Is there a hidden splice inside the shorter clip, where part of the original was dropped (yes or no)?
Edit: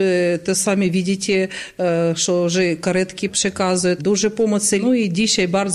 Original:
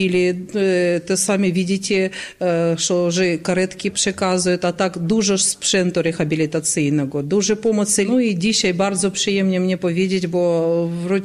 yes